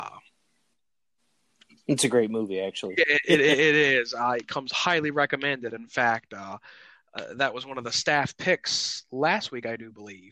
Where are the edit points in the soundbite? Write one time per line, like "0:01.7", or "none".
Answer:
none